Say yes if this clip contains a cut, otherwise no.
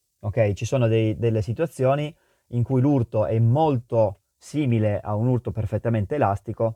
no